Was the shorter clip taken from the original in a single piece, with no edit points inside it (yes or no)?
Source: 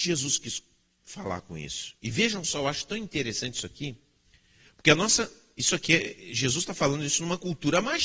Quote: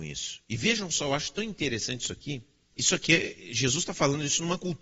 no